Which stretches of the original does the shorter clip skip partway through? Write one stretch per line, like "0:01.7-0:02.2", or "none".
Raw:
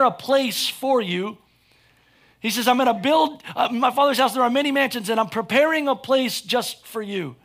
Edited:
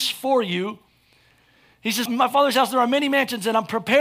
0:02.6-0:03.7